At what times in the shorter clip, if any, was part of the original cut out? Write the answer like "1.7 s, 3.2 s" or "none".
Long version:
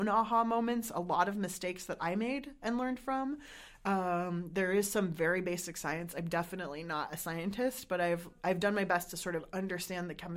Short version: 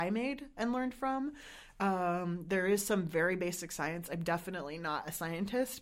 none